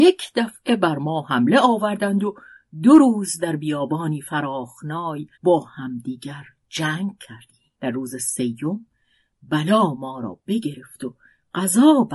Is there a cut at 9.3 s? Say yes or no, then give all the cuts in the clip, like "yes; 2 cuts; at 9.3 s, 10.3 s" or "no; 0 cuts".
no; 2 cuts; at 5.3 s, 7.8 s